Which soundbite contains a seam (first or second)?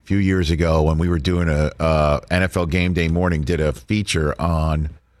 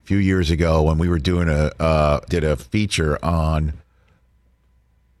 second